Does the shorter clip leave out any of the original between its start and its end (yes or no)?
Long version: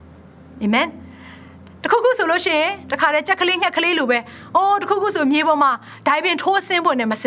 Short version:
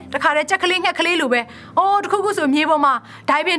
no